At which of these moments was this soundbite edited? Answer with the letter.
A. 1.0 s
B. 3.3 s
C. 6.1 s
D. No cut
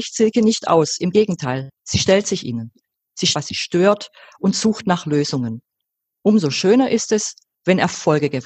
B